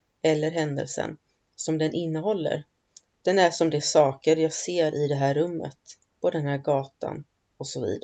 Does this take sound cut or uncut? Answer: cut